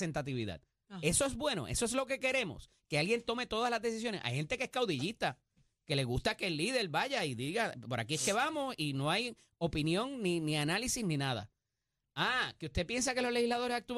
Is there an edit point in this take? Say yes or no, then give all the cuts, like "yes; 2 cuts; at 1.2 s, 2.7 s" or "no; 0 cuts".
no; 0 cuts